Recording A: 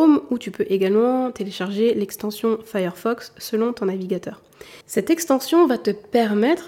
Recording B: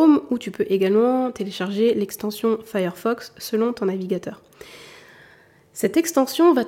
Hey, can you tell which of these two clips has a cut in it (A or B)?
A